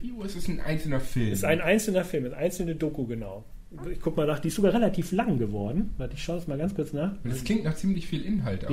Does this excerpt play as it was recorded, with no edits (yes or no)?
yes